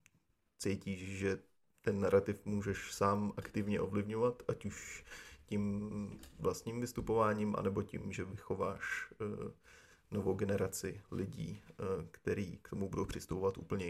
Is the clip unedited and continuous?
yes; 0 cuts

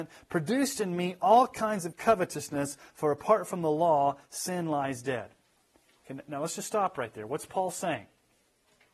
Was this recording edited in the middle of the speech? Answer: no; 0 cuts

